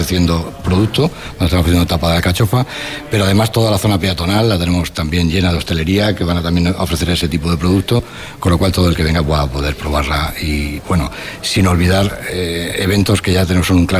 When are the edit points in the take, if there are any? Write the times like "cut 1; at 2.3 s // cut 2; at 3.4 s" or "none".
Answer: none